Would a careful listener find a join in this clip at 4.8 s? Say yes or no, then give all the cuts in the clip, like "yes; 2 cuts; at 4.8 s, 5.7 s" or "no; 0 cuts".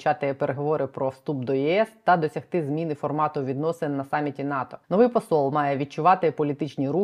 yes; 1 cut; at 4.8 s